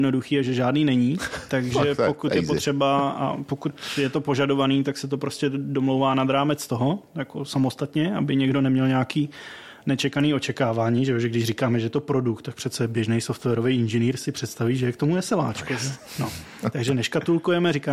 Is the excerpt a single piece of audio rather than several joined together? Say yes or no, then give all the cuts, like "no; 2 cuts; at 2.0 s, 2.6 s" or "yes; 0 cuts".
yes; 0 cuts